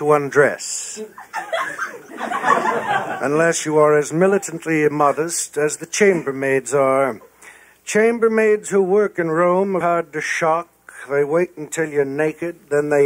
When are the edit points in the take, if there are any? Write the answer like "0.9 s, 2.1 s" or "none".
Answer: 2.1 s, 9.8 s